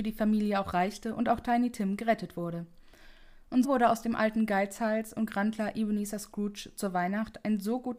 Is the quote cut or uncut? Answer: cut